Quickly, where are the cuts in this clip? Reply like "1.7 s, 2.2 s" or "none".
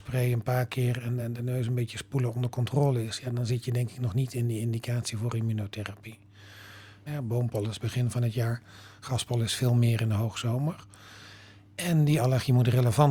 1.2 s, 7.1 s